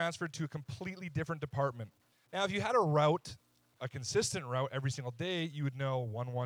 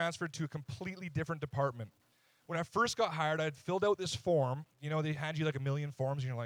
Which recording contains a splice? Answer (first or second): first